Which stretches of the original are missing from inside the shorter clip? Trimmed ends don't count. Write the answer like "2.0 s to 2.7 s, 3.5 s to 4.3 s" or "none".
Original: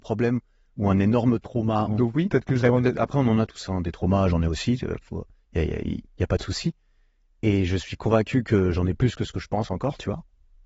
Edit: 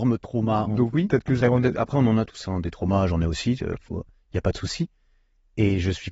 5.5 s to 6.2 s